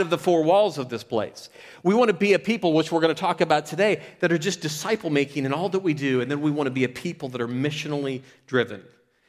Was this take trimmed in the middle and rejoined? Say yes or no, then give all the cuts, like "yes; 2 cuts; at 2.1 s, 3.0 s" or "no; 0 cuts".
no; 0 cuts